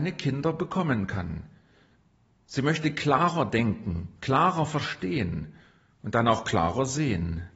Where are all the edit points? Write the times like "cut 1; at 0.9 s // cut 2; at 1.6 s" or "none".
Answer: none